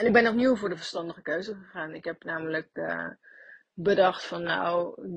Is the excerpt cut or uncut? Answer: uncut